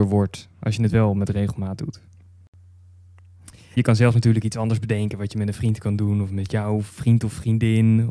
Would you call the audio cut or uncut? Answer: cut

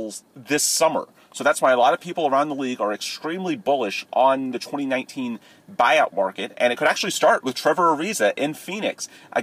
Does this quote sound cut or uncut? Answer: uncut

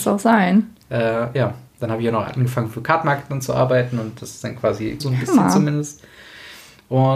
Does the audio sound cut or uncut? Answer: cut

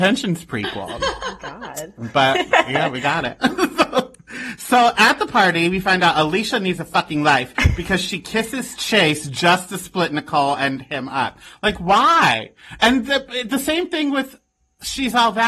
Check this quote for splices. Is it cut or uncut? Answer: uncut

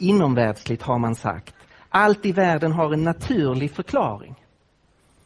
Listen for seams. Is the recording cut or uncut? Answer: uncut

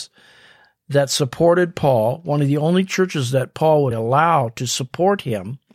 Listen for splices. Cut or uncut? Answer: cut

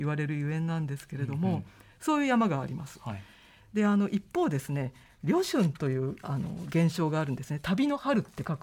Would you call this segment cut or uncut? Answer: uncut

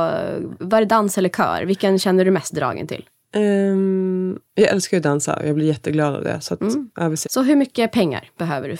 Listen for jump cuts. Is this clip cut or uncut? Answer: cut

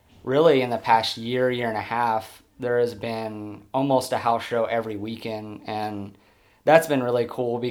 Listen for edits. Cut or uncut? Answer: uncut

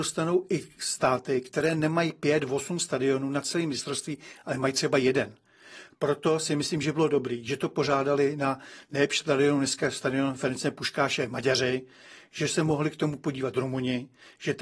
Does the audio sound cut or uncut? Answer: uncut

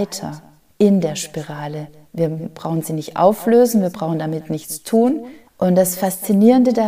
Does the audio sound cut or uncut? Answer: cut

